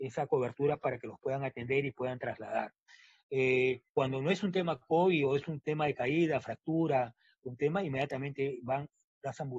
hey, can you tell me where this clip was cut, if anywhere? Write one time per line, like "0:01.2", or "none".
none